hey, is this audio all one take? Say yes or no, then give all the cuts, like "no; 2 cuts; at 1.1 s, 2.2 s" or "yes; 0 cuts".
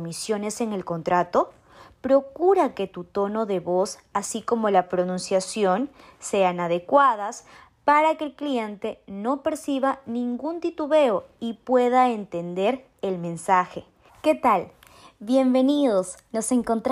no; 1 cut; at 14.1 s